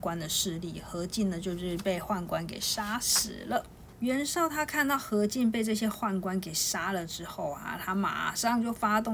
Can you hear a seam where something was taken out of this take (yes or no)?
yes